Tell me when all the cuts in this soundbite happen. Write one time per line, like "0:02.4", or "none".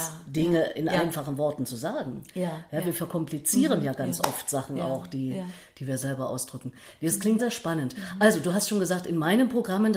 0:07.4

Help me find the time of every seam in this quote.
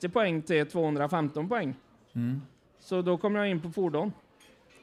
none

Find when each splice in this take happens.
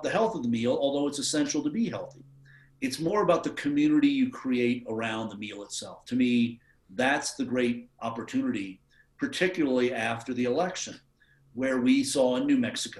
none

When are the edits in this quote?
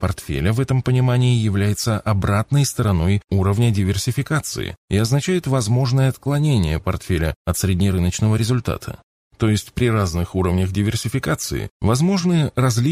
none

